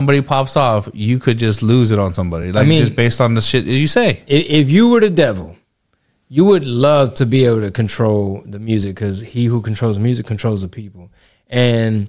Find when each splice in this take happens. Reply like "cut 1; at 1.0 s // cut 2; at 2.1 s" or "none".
none